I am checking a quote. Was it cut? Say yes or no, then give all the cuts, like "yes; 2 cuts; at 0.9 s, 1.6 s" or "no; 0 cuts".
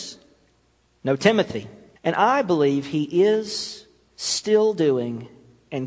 yes; 1 cut; at 2.0 s